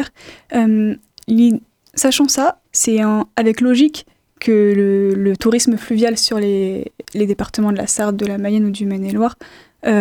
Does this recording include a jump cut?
yes; 1 cut; at 2.6 s

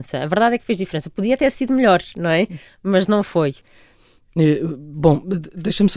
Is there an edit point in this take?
no; 0 cuts

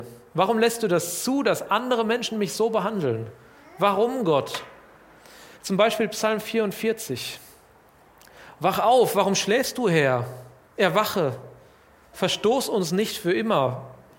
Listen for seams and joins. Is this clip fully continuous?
no; 1 cut; at 5.5 s

